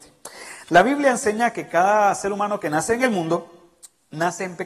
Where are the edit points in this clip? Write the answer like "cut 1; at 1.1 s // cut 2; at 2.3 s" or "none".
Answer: none